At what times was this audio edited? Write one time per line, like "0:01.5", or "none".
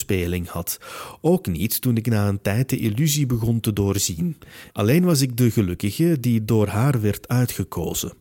0:04.7